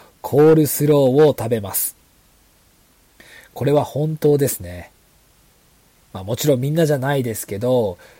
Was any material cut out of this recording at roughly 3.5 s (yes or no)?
no